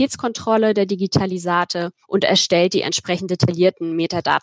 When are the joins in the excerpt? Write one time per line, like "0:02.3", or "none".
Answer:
0:02.0